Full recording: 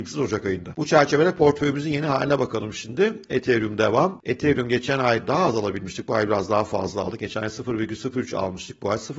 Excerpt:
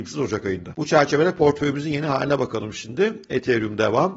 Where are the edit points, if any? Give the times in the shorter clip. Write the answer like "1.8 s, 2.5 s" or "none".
none